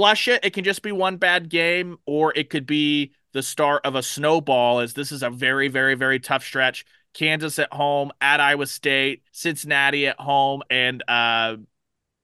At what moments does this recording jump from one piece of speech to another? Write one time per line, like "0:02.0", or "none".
0:09.3
0:10.7